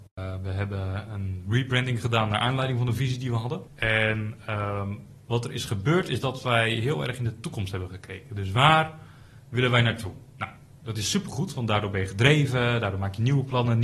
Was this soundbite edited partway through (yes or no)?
yes